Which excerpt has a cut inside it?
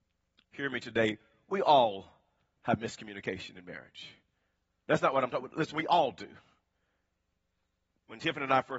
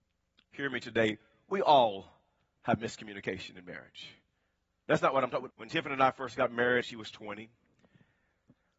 second; 2 cuts; at 5.5 s, 6.8 s

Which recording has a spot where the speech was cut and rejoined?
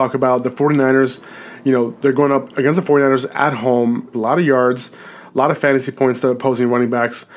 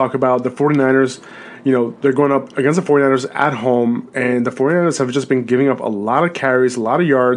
first; 1 cut; at 4.1 s

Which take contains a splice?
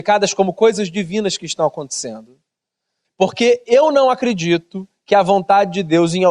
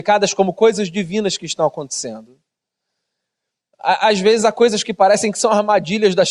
first; 1 cut; at 3.0 s

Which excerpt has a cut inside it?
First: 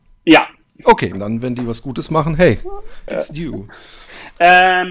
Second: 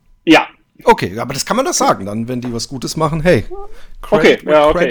first; 2 cuts; at 1.1 s, 3.1 s

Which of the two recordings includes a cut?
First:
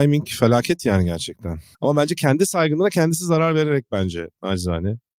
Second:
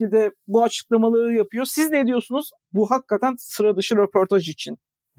first; 1 cut; at 1.7 s

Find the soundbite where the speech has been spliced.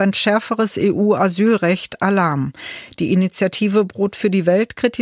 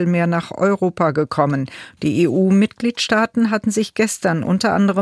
second; 1 cut; at 2.0 s

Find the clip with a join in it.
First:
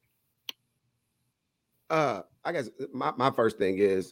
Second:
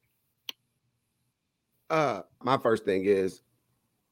second; 1 cut; at 2.4 s

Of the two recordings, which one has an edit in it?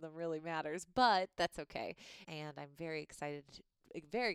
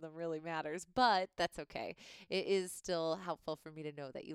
first; 1 cut; at 2.2 s

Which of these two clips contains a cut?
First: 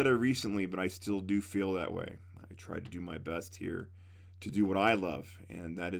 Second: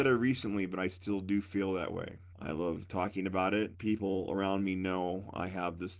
second; 2 cuts; at 2.3 s, 3.7 s

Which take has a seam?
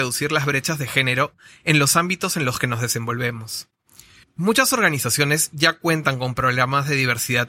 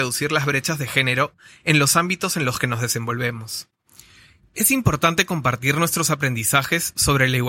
first; 1 cut; at 4.2 s

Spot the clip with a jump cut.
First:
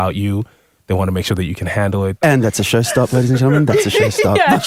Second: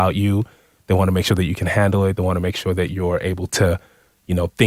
first; 1 cut; at 2.2 s

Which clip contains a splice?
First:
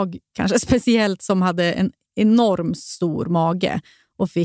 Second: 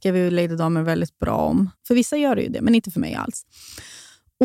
second; 1 cut; at 1.7 s

